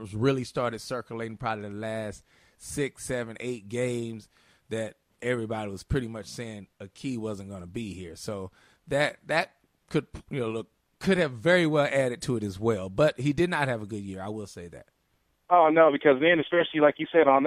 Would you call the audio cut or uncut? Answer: uncut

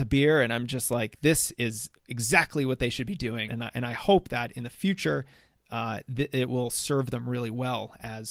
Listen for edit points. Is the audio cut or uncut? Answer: cut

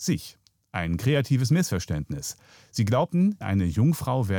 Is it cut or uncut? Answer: cut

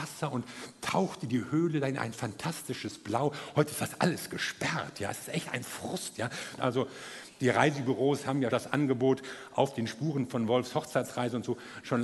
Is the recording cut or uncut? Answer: cut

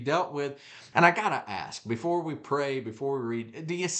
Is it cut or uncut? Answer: cut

